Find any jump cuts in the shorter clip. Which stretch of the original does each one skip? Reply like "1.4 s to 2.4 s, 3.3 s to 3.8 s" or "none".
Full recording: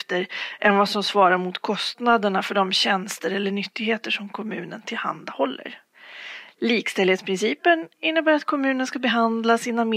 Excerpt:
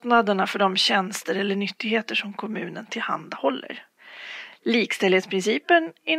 none